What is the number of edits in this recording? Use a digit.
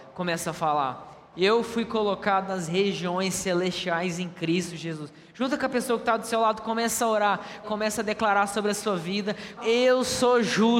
3